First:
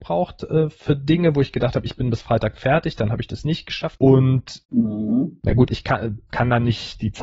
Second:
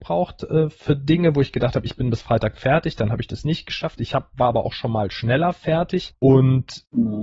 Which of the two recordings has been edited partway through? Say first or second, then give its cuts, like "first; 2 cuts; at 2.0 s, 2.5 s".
first; 2 cuts; at 4.0 s, 5.7 s